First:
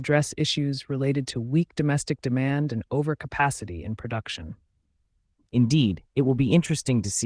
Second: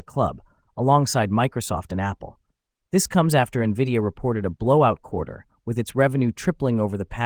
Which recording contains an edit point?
first; 1 cut; at 5.4 s

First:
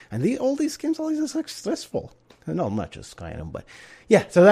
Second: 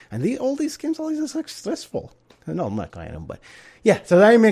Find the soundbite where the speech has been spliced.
second; 1 cut; at 2.9 s

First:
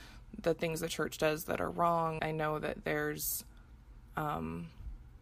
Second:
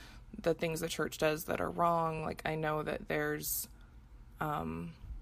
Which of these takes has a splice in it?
first; 1 cut; at 2.2 s

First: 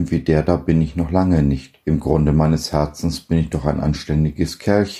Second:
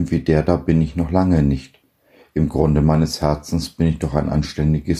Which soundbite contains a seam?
first; 1 cut; at 1.8 s

